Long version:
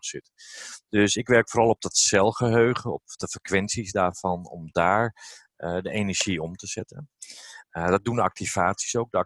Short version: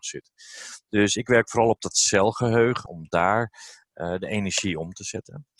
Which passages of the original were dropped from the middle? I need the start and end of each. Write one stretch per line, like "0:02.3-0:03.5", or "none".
0:02.9-0:04.5